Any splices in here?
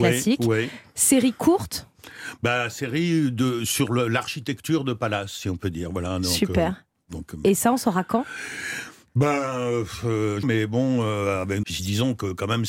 yes; 2 cuts; at 10.4 s, 11.6 s

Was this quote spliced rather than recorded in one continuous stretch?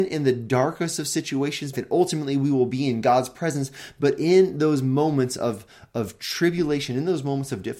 yes; 1 cut; at 1.7 s

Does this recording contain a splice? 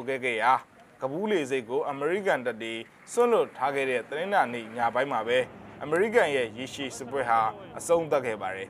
no; 0 cuts

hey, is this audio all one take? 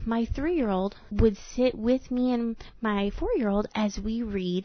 no; 1 cut; at 1.1 s

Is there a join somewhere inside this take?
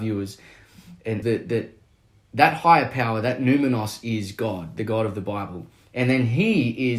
yes; 1 cut; at 1.2 s

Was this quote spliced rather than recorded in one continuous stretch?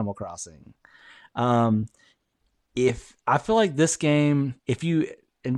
yes; 1 cut; at 4.6 s

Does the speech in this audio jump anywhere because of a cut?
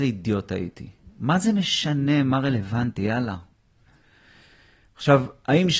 no; 0 cuts

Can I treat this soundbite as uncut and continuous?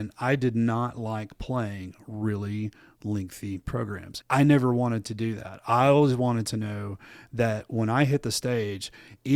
no; 1 cut; at 4.2 s

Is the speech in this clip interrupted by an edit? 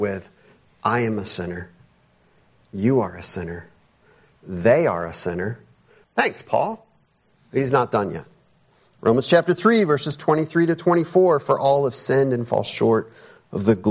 yes; 1 cut; at 6.0 s

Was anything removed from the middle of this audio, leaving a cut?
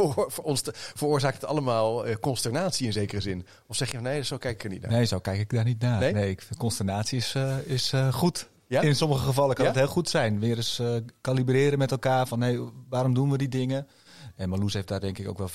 no; 0 cuts

